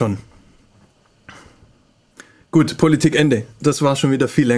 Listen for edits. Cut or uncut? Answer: uncut